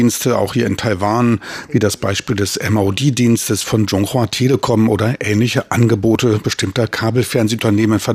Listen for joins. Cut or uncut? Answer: uncut